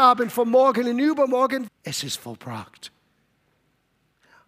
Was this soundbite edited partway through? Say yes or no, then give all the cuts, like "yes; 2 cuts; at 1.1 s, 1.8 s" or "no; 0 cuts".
yes; 1 cut; at 1.7 s